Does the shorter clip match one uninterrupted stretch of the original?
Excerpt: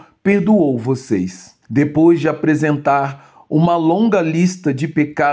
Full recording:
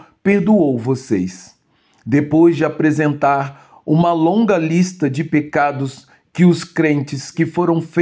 no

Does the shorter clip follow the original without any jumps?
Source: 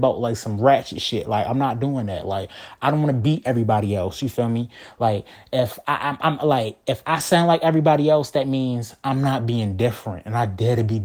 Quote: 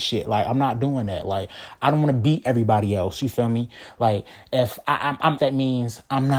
no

